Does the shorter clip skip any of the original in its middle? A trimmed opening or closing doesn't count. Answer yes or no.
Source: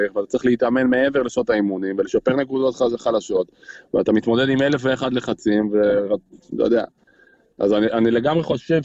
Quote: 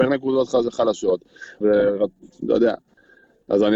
yes